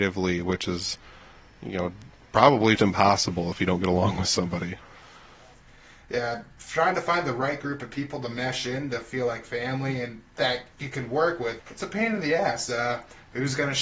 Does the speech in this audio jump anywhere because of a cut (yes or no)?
yes